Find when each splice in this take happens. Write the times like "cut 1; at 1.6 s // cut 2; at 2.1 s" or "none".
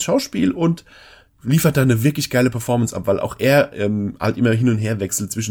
none

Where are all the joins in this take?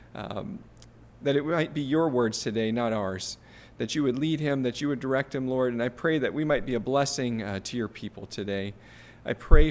none

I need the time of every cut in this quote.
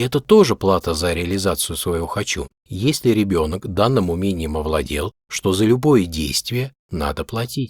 cut 1; at 2.6 s // cut 2; at 5.2 s

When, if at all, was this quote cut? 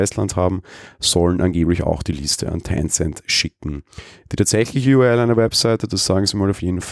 none

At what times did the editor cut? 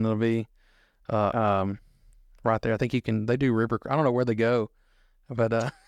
cut 1; at 1.3 s

